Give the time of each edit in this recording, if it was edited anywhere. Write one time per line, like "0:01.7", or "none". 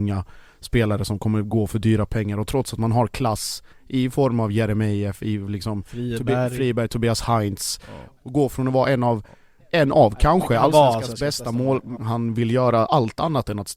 0:08.2
0:12.0